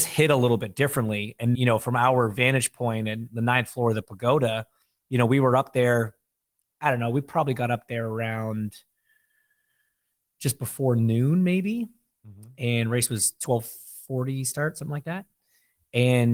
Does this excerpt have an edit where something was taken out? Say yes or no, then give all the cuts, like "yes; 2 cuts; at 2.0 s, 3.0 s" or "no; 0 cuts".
yes; 1 cut; at 1.5 s